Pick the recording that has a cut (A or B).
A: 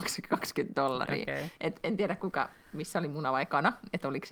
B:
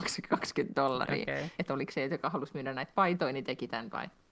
B